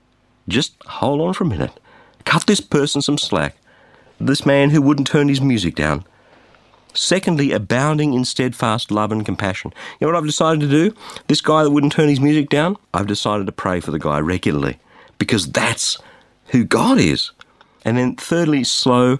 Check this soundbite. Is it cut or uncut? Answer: uncut